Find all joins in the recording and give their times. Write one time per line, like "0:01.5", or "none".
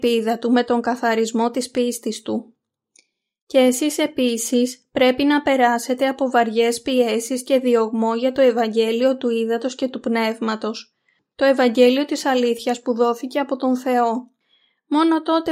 none